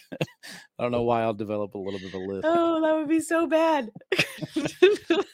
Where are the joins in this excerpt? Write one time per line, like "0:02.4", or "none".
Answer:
0:02.4